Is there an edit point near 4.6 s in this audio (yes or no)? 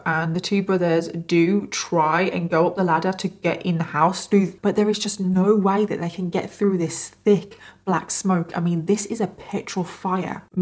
yes